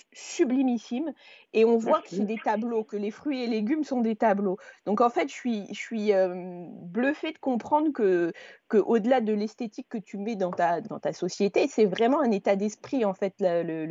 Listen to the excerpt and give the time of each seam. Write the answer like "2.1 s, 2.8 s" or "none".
10.8 s